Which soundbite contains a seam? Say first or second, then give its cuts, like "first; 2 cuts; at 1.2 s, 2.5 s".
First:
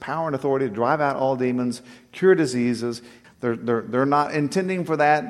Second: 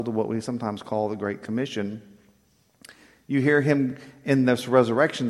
first; 1 cut; at 3.2 s